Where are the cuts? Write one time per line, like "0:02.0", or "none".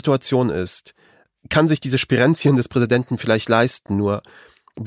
none